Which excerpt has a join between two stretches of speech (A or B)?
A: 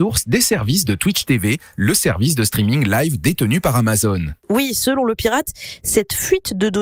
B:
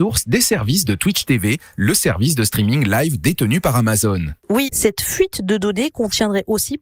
B